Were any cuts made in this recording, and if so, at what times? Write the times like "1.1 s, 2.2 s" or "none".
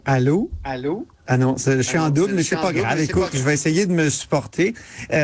1.1 s